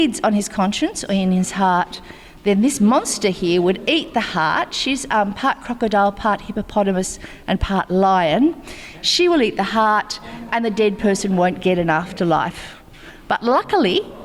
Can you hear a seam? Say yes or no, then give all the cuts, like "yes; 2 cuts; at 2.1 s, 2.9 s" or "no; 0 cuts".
no; 0 cuts